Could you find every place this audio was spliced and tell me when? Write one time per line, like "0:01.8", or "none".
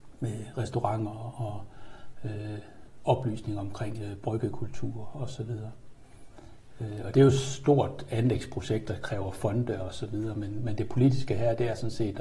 none